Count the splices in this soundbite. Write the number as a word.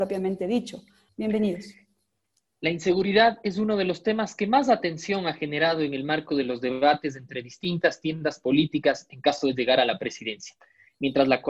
one